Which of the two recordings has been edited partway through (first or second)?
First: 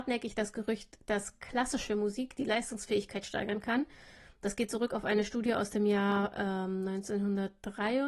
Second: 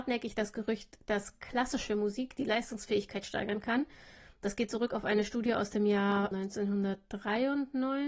second